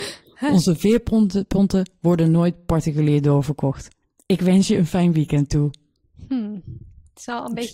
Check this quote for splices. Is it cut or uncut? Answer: uncut